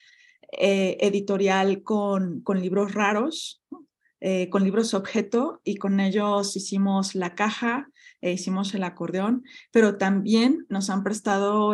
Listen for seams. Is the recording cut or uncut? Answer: uncut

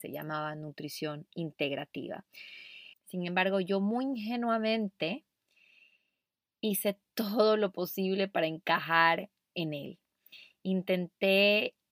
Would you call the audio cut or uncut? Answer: cut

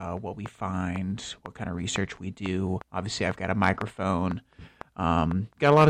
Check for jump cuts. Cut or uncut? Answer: cut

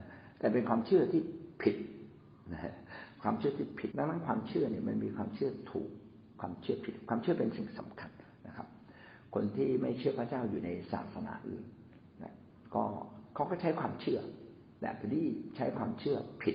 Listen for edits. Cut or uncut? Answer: cut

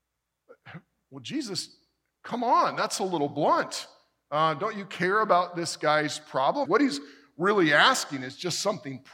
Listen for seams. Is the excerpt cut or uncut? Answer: cut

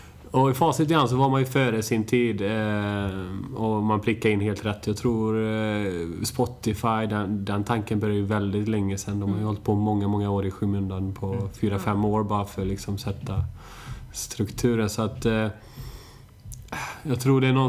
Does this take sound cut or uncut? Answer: uncut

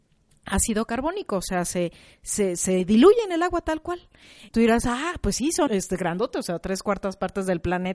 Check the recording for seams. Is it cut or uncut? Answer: cut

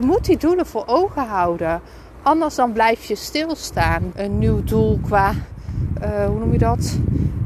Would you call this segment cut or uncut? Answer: cut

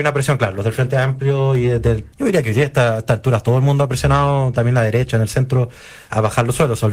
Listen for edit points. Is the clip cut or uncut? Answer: cut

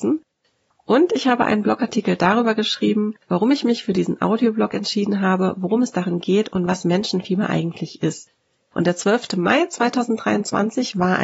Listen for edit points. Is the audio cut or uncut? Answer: cut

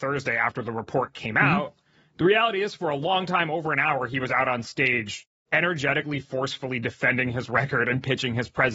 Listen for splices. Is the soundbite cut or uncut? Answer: cut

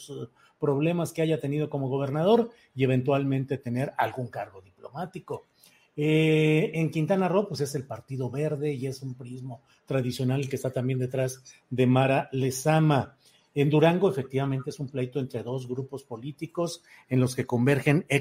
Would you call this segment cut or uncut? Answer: uncut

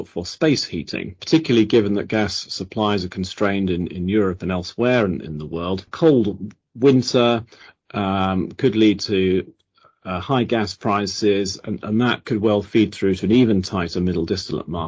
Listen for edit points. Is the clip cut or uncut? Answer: uncut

